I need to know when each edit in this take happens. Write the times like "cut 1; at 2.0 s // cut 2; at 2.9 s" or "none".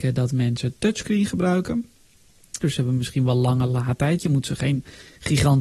cut 1; at 2.6 s